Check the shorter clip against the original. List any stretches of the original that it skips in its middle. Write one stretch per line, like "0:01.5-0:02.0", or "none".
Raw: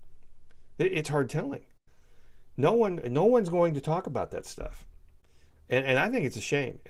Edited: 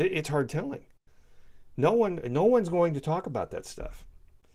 none